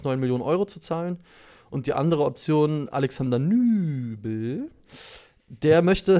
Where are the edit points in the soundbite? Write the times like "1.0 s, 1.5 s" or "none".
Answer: none